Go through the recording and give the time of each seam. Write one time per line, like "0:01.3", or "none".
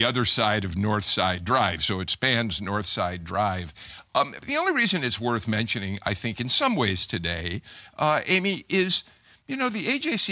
none